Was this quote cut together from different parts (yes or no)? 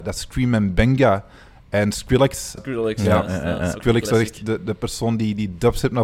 yes